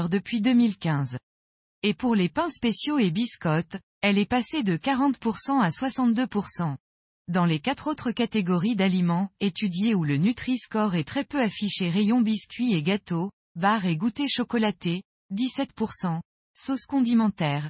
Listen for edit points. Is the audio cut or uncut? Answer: cut